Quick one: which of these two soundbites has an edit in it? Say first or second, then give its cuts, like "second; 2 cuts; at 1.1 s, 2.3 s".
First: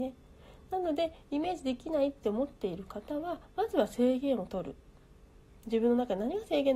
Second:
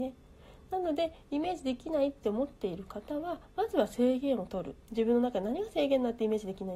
second; 1 cut; at 4.8 s